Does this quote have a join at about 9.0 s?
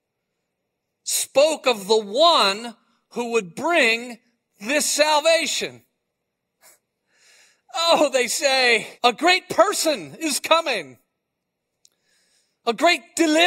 yes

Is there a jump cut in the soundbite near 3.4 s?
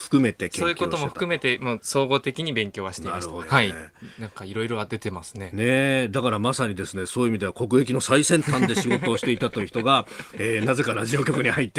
yes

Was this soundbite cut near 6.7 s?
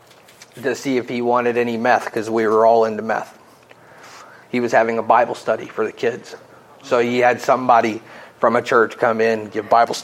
no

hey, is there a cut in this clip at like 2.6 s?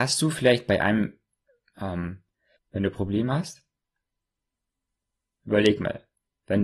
yes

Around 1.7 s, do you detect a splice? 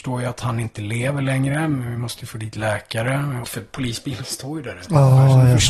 no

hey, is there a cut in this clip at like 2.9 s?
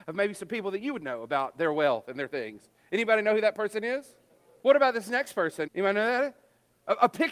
no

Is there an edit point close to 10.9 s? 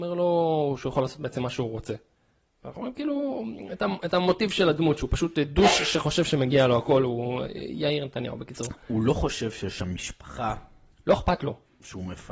no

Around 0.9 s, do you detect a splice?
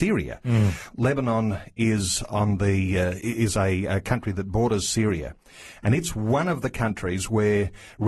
yes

